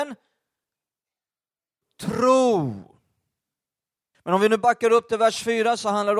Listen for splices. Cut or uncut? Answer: cut